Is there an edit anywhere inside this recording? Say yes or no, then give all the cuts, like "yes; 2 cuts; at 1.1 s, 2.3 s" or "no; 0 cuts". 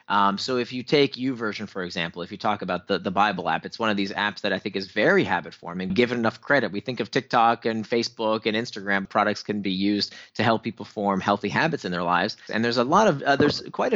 yes; 3 cuts; at 5.9 s, 9.0 s, 12.5 s